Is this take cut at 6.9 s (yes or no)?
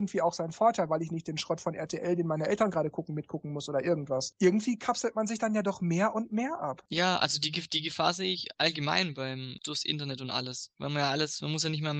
no